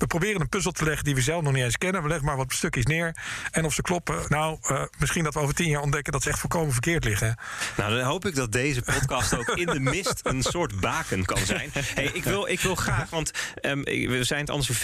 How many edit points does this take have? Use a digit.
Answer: 0